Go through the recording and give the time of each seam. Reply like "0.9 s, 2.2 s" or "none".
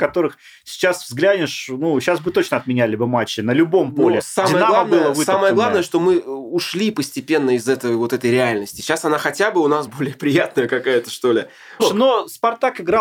9.9 s, 11.8 s

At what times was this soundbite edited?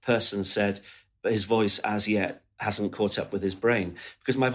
1.2 s

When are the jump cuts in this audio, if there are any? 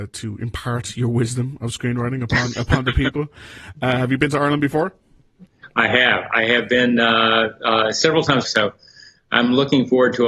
8.4 s

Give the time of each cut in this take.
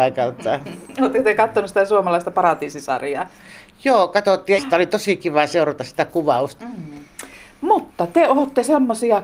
4.6 s, 6.6 s

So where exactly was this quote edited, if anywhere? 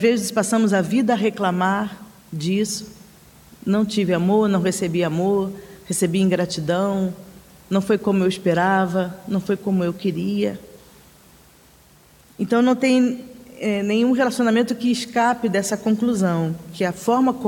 none

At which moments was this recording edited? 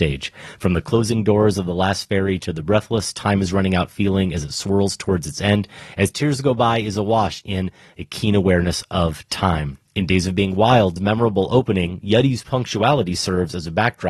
none

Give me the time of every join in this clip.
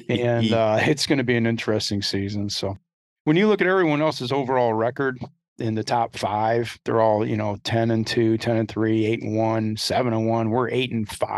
none

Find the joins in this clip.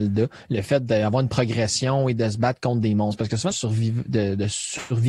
3.5 s

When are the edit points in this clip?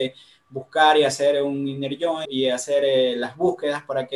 2.2 s

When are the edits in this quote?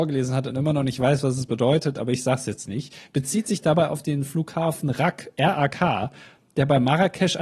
none

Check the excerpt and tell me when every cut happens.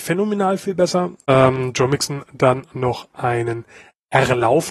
1.2 s

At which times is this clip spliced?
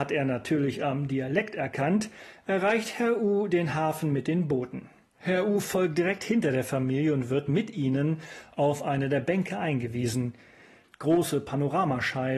5.1 s, 10.8 s

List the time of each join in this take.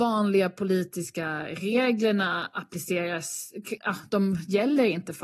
3.8 s

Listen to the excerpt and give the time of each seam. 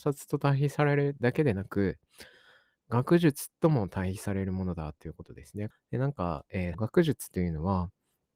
5.7 s, 6.7 s

